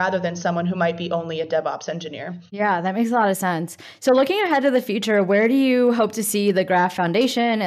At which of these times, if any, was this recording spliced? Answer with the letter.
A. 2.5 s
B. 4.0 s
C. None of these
A